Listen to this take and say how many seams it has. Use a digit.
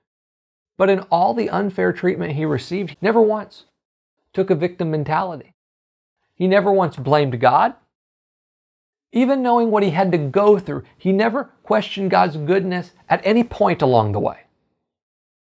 1